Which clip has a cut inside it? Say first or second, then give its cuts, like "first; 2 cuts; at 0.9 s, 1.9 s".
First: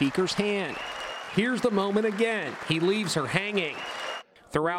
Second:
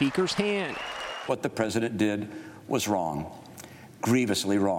second; 1 cut; at 1.3 s